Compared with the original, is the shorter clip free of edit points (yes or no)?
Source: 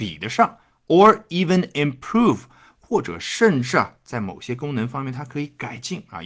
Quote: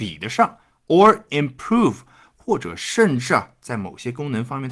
no